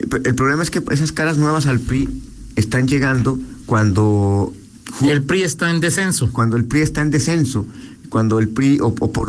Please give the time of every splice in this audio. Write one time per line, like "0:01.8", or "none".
none

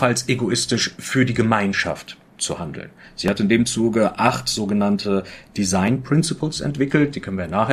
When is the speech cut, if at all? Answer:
none

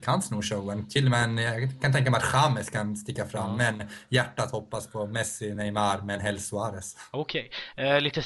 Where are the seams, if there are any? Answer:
none

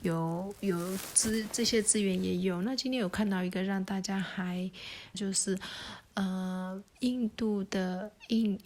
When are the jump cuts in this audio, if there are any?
0:05.1

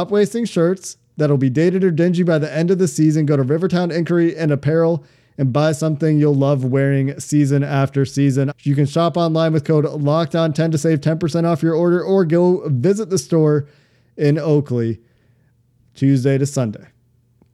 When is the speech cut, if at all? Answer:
0:08.5

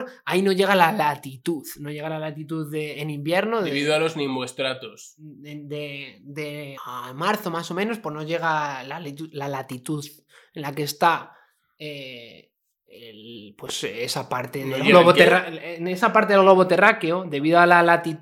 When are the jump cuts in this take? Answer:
0:06.8

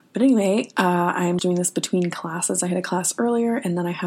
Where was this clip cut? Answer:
0:01.4

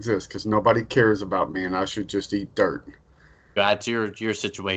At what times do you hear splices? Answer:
0:03.6

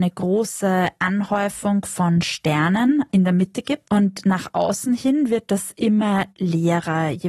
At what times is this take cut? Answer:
0:03.9

